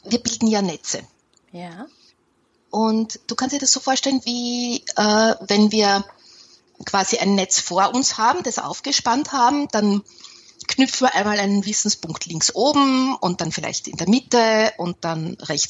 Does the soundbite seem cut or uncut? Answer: uncut